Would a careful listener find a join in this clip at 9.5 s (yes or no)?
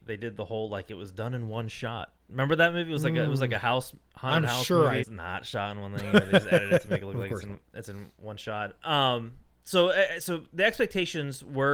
no